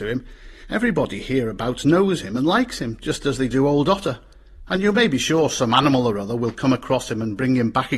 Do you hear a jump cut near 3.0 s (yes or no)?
no